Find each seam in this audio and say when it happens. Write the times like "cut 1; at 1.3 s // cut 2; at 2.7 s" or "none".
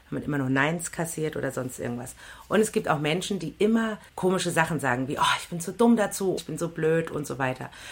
cut 1; at 4.1 s // cut 2; at 6.4 s